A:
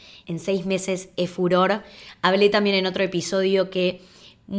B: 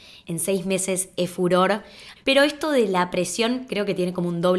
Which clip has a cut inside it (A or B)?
B